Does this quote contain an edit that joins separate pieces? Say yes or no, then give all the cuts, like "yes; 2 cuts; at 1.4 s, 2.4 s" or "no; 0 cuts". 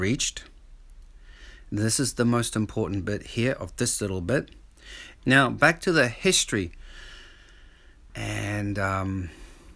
yes; 2 cuts; at 5.2 s, 8.1 s